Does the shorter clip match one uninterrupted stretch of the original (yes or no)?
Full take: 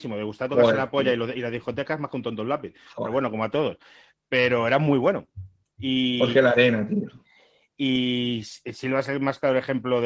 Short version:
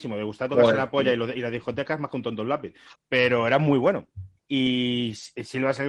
no